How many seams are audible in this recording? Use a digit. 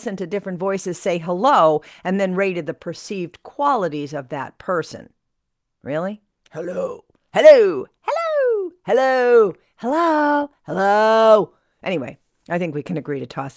0